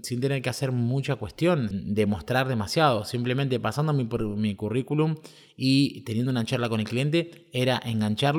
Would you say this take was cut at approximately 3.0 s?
no; 1 cut; at 1.7 s

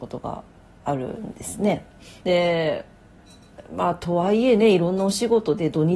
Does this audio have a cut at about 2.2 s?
yes; 1 cut; at 2.2 s

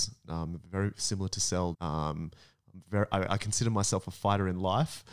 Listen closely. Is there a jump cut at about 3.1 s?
no; 1 cut; at 1.7 s

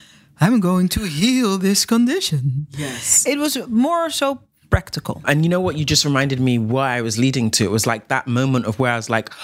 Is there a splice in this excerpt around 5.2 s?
yes; 1 cut; at 5.2 s

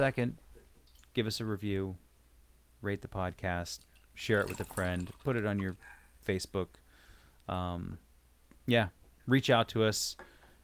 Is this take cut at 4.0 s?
no; 0 cuts

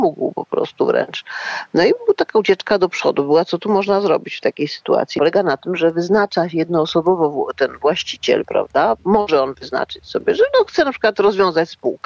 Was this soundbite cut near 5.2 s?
yes; 1 cut; at 5.2 s

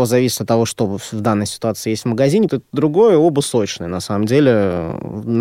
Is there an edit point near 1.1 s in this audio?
no; 1 cut; at 2.5 s

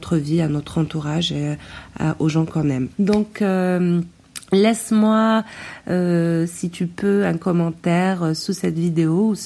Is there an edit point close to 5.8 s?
no; 1 cut; at 2.9 s

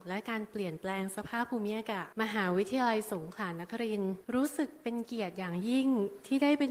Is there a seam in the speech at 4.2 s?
yes; 2 cuts; at 2.1 s, 4.2 s

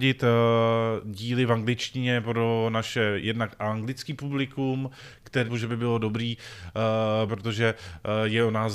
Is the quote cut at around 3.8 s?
no; 2 cuts; at 5.5 s, 7.3 s

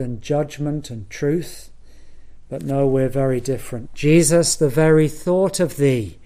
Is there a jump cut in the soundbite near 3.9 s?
yes; 1 cut; at 3.9 s

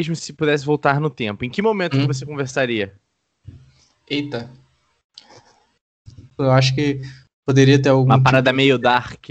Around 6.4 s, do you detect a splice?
yes; 1 cut; at 6.4 s

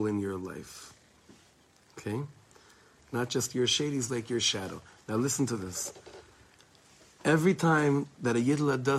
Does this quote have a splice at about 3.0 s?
yes; 1 cut; at 3.0 s

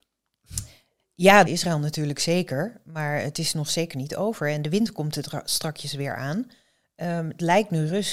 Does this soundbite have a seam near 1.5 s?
yes; 1 cut; at 1.5 s

